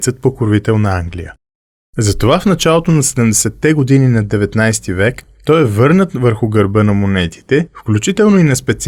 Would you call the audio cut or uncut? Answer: uncut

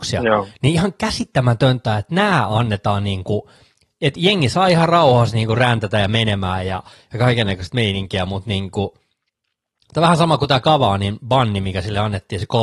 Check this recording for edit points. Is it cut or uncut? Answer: uncut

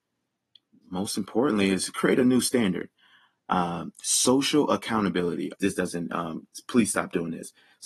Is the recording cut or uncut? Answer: cut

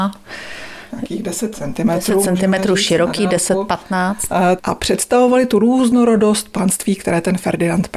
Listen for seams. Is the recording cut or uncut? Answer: cut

